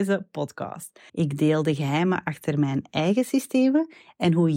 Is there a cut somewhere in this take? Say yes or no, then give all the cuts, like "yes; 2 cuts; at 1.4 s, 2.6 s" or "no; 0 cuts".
yes; 1 cut; at 1.1 s